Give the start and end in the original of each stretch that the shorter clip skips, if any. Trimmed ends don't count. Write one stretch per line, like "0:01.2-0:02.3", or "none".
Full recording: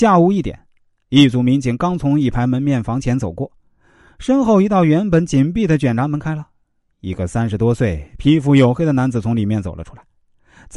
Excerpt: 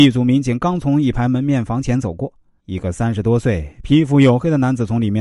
0:03.8-0:06.9